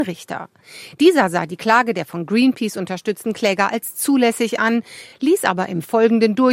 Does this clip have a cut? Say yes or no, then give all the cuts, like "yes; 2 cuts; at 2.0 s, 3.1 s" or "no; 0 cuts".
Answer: no; 0 cuts